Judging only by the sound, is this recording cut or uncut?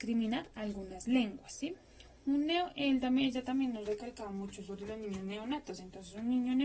uncut